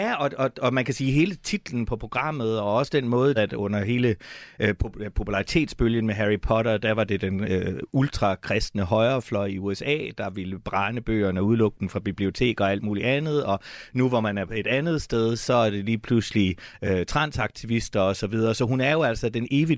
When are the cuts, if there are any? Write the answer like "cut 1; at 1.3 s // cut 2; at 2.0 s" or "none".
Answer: cut 1; at 3.4 s